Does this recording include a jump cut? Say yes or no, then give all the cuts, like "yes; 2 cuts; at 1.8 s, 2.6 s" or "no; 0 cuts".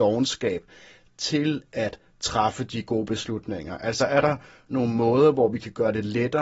no; 0 cuts